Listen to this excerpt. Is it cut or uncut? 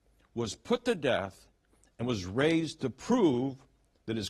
uncut